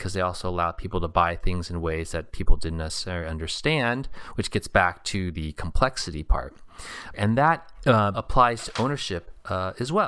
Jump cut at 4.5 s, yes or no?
no